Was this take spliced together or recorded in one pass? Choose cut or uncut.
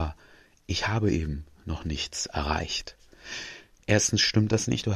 uncut